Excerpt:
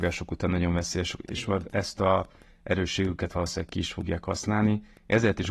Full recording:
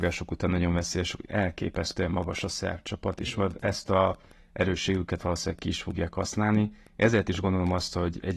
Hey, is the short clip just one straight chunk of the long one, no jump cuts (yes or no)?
no